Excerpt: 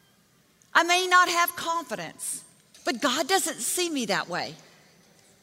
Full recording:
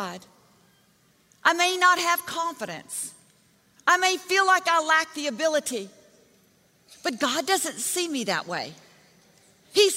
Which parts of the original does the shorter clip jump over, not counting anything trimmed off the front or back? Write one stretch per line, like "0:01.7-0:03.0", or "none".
0:03.4-0:06.9